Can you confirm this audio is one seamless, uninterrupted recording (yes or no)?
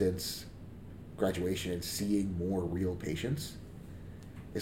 yes